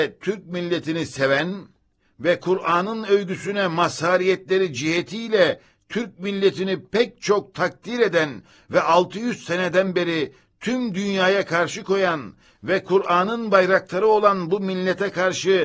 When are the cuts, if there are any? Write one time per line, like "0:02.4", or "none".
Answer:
none